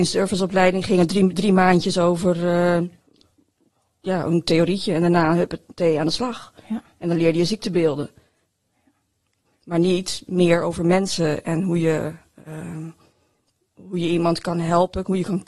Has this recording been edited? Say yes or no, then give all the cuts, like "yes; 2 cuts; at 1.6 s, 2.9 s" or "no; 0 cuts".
no; 0 cuts